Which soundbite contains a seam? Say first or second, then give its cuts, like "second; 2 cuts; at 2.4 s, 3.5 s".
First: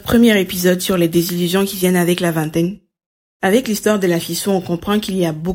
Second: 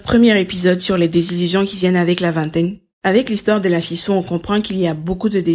second; 1 cut; at 2.9 s